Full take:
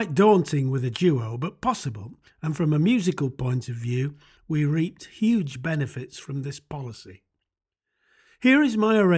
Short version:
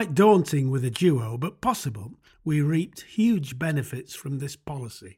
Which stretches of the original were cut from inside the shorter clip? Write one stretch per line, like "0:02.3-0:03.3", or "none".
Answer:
0:02.3-0:04.3

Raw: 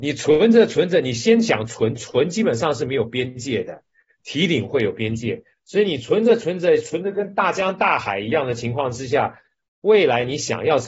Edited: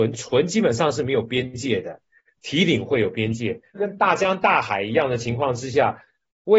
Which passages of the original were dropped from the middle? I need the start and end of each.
0:05.6-0:07.1

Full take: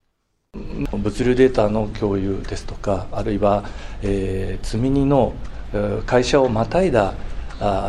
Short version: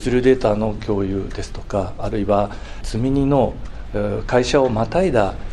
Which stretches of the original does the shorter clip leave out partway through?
0:03.9-0:04.6

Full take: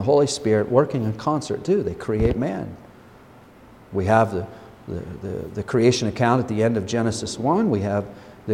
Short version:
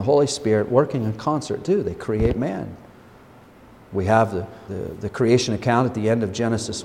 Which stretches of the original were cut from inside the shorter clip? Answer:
0:04.7-0:05.2

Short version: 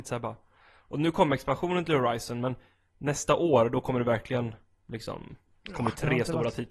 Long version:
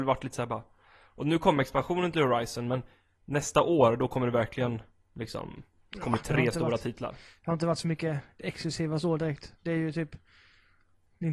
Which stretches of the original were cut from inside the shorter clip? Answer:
none

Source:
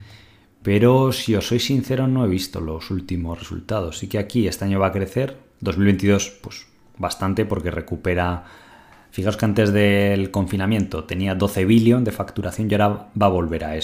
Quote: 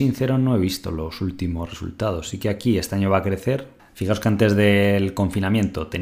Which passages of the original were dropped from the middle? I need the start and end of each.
0:05.5-0:09.0

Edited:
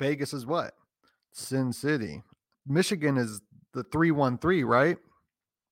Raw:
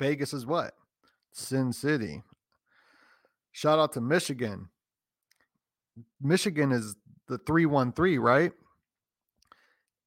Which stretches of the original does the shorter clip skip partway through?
0:02.5-0:06.1

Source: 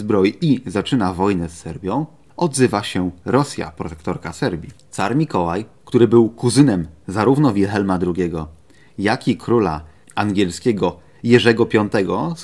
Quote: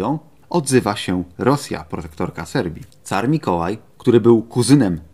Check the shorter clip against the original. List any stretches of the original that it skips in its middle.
none

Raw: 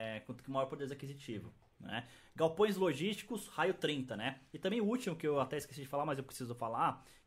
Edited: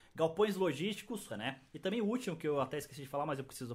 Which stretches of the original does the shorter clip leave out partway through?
0:03.5-0:04.1

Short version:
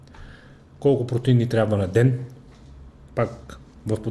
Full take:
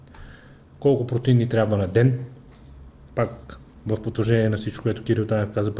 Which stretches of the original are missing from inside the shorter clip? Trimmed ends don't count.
none

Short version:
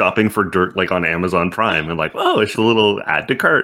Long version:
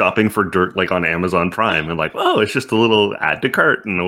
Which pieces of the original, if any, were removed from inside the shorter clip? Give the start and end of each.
0:02.5-0:02.7

